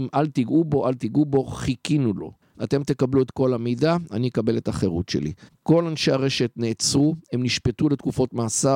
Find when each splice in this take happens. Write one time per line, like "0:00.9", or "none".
0:02.5
0:05.5